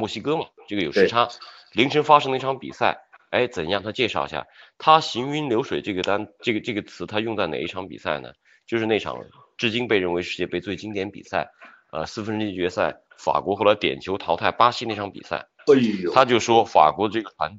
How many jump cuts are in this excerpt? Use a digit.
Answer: 0